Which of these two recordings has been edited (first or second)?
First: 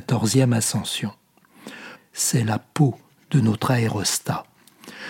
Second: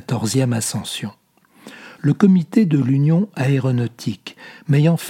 first